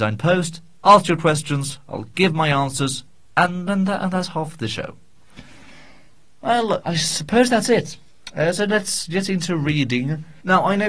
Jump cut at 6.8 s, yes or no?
yes